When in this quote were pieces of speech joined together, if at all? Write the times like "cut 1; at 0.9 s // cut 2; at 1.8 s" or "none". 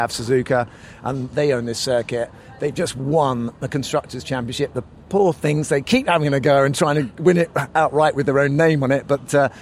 none